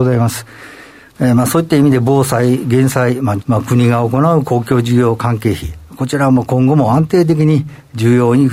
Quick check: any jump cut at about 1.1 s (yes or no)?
yes